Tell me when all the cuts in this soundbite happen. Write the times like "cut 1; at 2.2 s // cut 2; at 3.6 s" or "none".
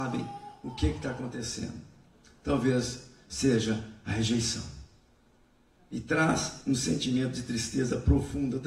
none